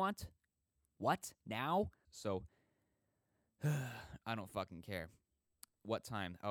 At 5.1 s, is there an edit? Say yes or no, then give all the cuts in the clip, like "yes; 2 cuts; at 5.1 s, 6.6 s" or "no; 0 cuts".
no; 1 cut; at 2.1 s